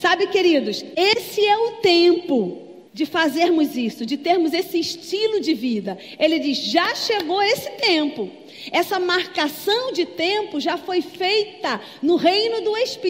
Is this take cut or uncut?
cut